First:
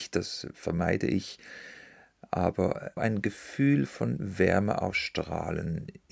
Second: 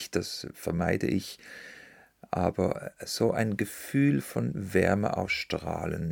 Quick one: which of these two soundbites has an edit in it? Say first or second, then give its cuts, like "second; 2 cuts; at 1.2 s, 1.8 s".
first; 1 cut; at 3.0 s